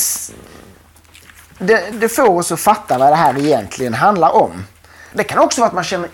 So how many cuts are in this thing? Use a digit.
2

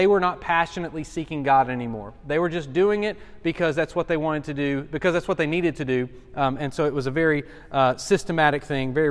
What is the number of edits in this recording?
0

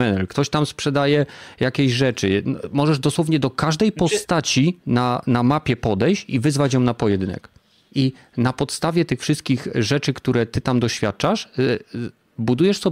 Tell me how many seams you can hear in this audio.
1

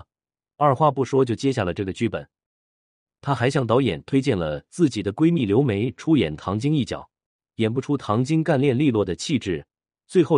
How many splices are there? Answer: 1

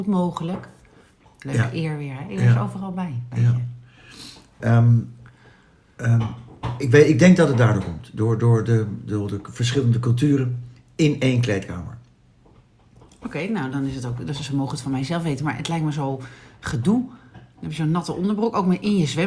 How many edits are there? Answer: 1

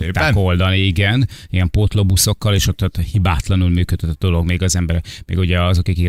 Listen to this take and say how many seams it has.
0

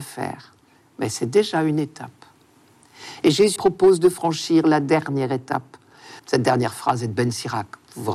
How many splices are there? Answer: 2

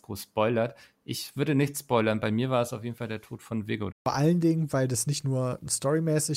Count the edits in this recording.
1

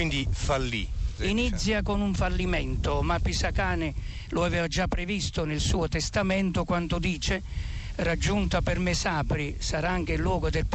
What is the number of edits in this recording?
1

